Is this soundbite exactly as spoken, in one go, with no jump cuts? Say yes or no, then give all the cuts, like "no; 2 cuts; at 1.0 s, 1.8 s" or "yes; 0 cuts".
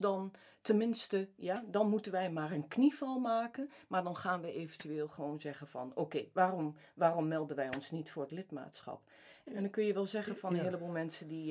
no; 1 cut; at 9.5 s